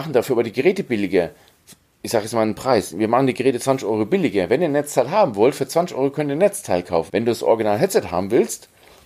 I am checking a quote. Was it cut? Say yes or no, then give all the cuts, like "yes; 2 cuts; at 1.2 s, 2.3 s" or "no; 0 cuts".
yes; 1 cut; at 7.1 s